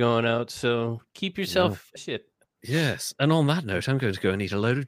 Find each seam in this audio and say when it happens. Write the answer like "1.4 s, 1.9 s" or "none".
2.0 s